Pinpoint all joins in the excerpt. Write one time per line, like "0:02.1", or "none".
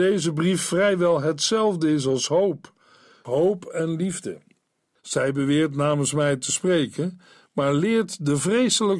0:03.2
0:05.0